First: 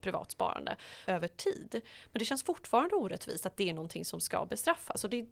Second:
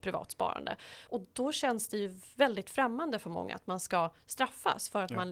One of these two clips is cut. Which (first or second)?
first